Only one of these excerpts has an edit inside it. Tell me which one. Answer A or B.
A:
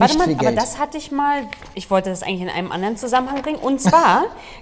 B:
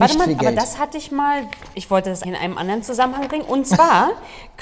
B